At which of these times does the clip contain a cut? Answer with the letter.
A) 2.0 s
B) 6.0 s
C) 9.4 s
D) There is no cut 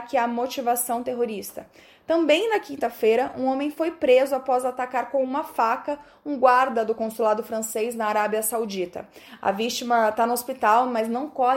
D